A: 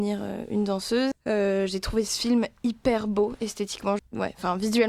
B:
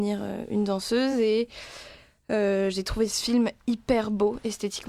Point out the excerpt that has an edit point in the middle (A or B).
A